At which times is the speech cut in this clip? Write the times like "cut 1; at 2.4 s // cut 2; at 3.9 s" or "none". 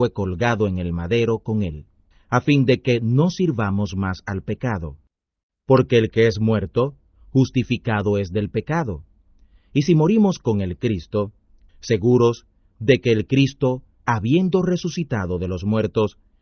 cut 1; at 2.1 s // cut 2; at 11.7 s